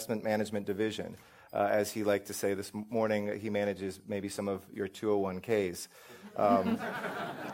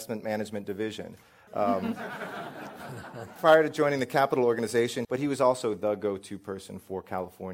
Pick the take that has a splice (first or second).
second